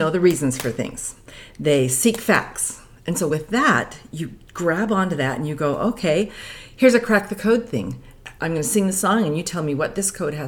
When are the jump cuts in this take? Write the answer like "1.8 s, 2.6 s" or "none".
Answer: none